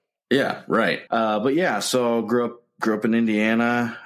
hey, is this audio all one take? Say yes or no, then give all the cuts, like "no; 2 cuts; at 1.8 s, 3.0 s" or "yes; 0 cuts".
no; 1 cut; at 1.1 s